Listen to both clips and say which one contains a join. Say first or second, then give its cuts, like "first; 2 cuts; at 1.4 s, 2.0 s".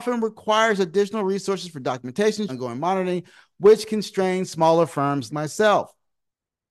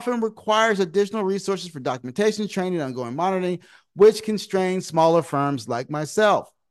first; 2 cuts; at 2.5 s, 5.3 s